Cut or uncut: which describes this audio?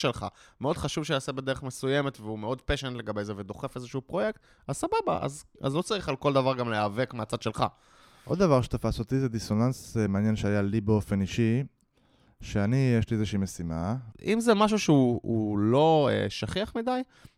cut